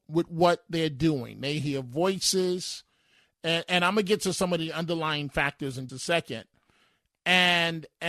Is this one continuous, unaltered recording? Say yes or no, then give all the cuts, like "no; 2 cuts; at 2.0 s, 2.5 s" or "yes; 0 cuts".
no; 1 cut; at 5.9 s